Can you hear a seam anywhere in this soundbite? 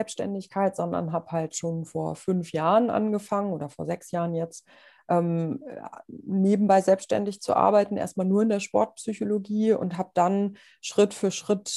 no; 0 cuts

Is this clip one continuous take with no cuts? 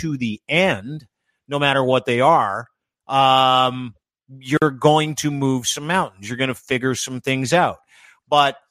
yes; 0 cuts

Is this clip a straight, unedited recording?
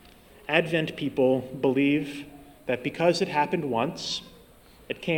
yes; 0 cuts

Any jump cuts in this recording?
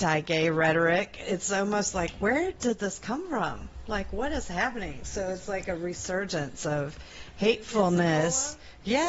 no; 0 cuts

